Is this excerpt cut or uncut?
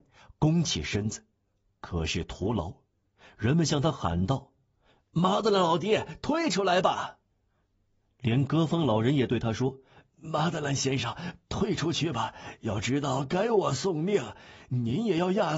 uncut